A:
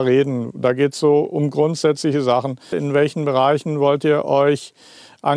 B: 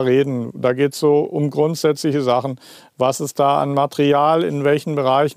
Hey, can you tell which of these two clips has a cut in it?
A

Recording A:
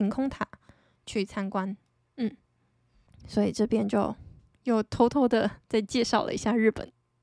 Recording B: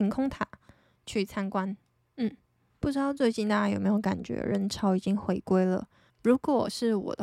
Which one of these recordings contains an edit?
B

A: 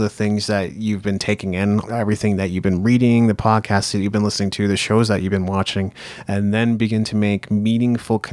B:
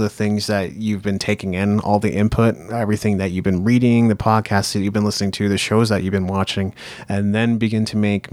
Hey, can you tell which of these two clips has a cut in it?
A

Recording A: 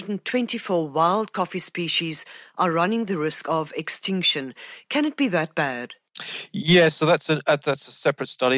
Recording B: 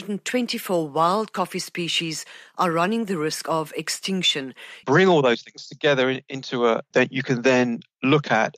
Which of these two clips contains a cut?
B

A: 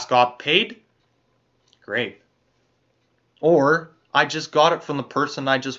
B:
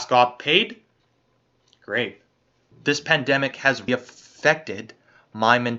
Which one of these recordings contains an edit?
B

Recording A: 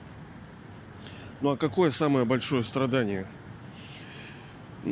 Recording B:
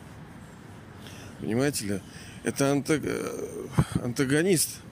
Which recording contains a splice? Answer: B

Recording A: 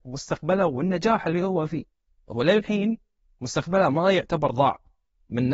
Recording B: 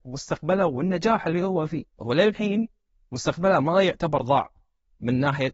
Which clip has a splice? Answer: B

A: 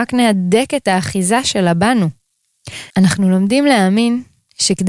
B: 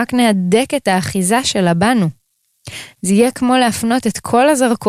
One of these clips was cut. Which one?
A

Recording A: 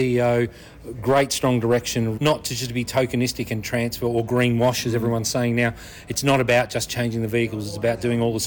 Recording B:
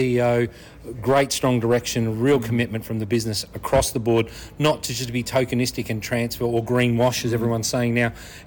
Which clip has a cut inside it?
A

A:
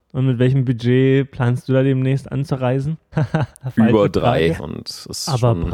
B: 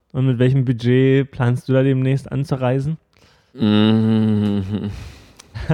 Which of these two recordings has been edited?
A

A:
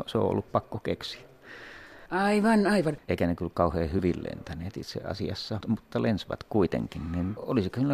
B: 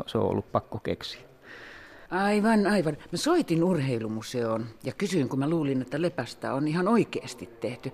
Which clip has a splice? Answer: A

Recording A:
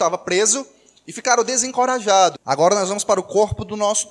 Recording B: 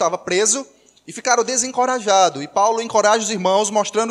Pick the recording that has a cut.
A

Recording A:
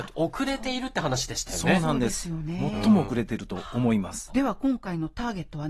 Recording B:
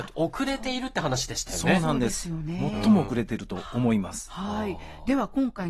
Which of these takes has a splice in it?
A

